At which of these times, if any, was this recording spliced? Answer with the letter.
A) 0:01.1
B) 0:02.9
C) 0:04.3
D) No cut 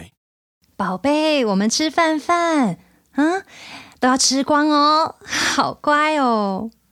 D